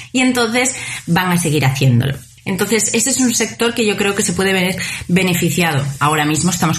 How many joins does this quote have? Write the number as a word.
one